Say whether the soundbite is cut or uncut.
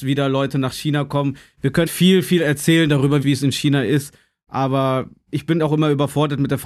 cut